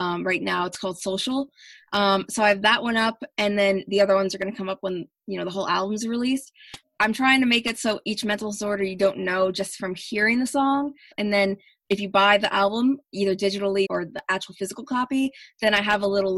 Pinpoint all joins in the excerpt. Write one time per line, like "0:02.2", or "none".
0:06.8
0:11.1
0:13.8